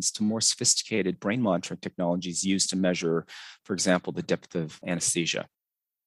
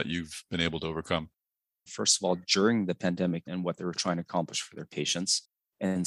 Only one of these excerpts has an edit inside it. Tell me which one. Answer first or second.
second